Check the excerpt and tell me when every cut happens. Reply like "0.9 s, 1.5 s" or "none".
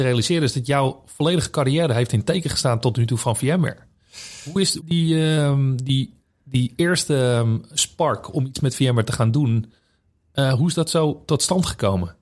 4.8 s